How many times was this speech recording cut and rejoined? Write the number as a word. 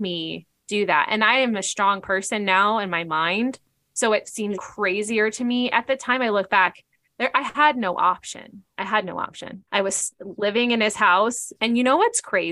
three